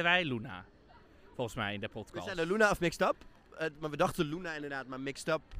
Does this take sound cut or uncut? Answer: uncut